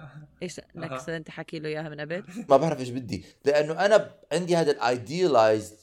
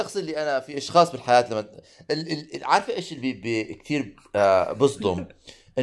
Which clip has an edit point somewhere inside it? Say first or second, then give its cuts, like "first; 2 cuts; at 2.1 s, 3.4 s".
first; 1 cut; at 2.5 s